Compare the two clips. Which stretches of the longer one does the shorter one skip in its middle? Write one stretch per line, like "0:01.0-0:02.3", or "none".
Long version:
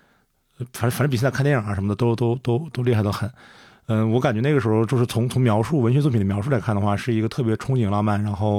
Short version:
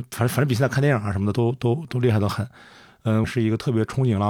0:02.0-0:02.2
0:04.1-0:07.0